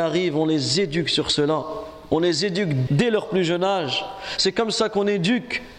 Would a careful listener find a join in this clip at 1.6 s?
no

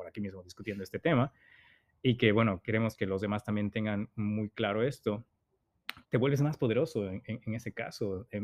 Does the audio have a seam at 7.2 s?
no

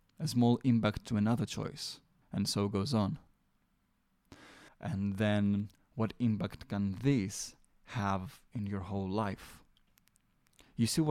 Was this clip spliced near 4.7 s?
yes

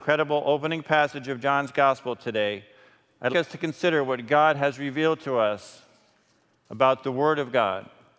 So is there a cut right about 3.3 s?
yes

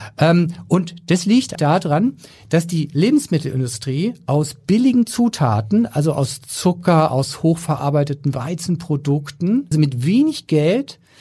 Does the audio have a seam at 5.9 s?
no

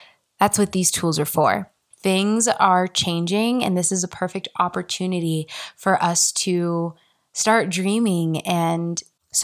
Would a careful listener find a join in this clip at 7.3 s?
no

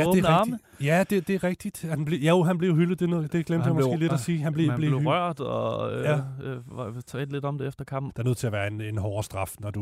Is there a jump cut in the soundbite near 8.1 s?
yes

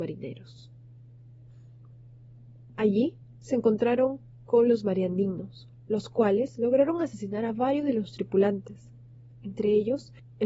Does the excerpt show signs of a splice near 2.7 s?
yes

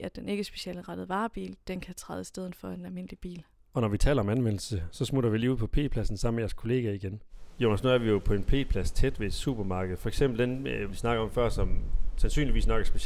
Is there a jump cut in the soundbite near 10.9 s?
yes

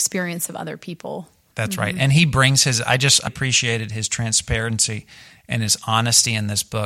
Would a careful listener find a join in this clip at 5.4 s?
no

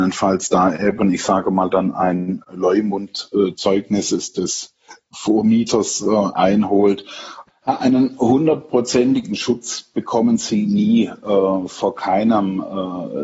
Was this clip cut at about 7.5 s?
yes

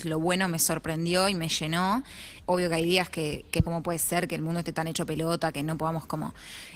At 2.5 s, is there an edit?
yes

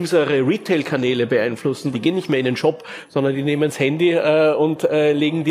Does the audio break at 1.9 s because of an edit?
yes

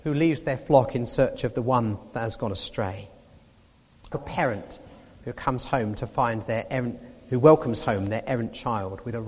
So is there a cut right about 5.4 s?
no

